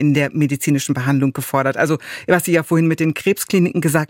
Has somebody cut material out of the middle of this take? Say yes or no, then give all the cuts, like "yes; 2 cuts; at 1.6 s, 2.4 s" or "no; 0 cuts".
no; 0 cuts